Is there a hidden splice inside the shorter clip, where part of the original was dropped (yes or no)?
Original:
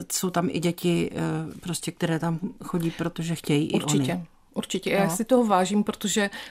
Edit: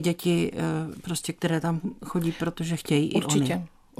no